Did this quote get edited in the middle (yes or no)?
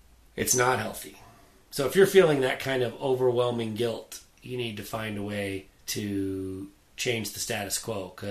yes